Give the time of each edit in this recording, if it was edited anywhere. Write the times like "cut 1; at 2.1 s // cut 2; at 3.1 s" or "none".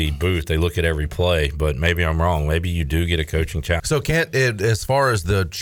cut 1; at 3.8 s